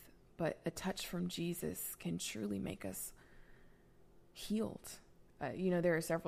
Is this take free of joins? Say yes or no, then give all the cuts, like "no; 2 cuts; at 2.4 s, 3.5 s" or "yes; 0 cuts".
no; 1 cut; at 5.3 s